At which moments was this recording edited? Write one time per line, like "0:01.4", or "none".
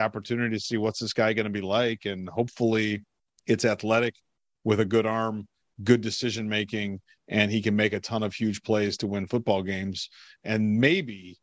none